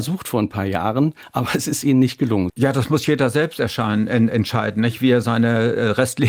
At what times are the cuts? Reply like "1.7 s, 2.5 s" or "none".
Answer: 2.5 s